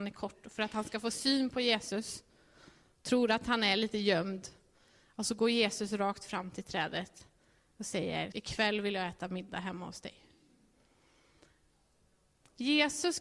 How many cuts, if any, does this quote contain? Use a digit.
1